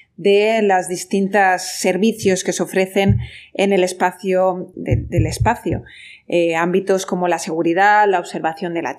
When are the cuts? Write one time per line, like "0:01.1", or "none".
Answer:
0:04.7